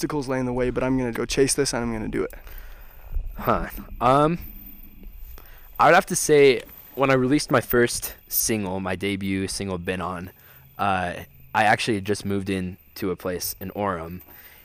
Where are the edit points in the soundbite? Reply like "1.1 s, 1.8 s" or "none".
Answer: 1.1 s